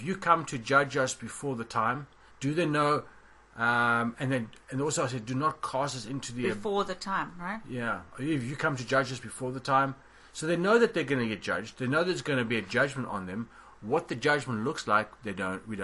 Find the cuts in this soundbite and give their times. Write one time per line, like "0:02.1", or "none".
0:02.3